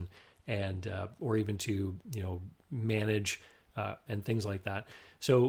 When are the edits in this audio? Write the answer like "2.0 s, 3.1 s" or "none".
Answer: 4.1 s